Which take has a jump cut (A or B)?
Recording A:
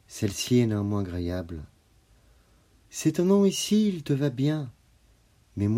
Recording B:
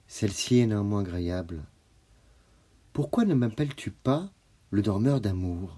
A